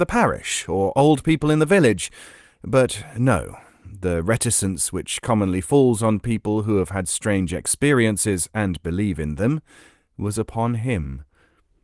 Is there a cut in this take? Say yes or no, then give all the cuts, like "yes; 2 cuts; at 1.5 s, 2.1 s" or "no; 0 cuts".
no; 0 cuts